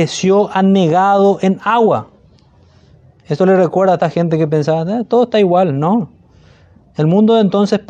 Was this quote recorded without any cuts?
yes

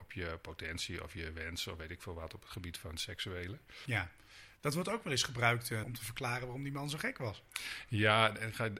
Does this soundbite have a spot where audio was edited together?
yes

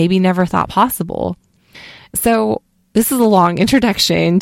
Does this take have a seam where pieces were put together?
no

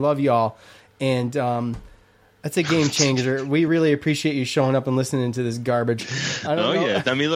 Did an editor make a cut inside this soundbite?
no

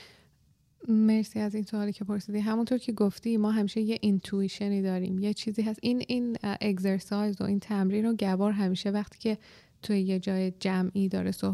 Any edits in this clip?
no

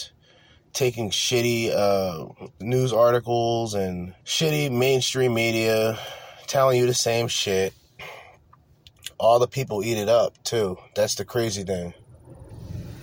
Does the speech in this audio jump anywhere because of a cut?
yes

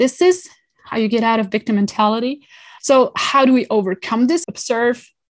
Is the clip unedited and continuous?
no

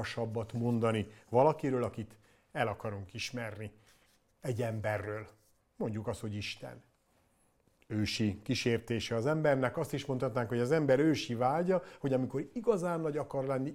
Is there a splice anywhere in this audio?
no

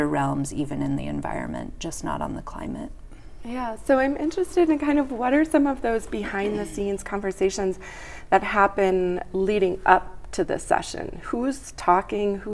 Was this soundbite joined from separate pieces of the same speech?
no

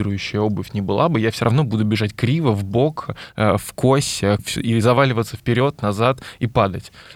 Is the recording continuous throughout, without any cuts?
no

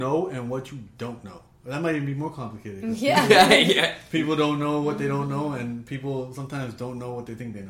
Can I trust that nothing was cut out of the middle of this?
yes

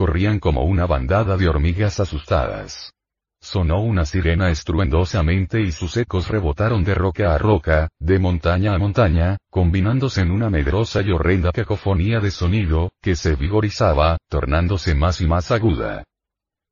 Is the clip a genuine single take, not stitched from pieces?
yes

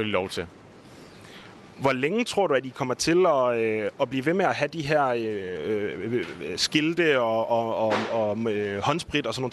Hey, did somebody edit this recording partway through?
no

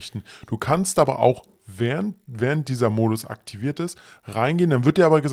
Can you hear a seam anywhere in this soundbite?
no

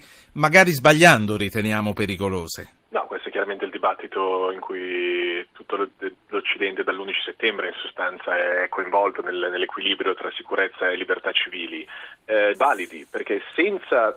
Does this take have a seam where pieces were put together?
yes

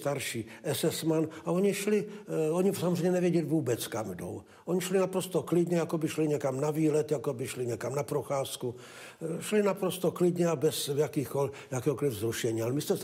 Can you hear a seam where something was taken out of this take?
no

